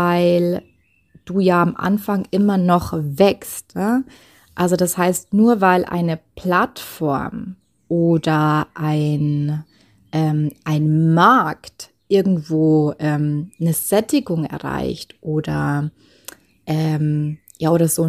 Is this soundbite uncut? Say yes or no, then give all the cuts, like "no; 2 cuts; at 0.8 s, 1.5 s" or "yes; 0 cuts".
yes; 0 cuts